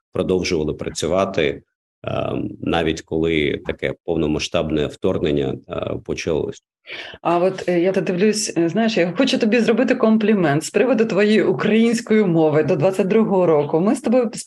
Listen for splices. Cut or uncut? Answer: cut